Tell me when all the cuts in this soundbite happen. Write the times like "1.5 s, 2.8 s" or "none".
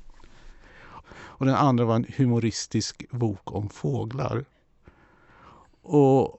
1.0 s